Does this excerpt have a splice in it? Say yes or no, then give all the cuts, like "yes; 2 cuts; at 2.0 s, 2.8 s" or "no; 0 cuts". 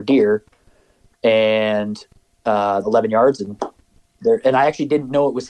yes; 1 cut; at 2.8 s